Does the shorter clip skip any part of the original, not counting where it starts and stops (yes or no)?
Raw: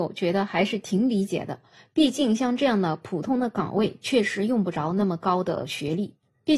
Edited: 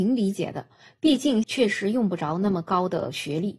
yes